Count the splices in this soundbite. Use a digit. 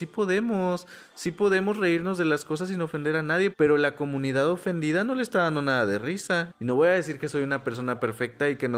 2